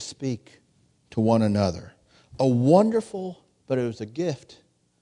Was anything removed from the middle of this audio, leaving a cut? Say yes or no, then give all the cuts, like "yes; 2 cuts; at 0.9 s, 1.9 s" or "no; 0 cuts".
yes; 1 cut; at 3.6 s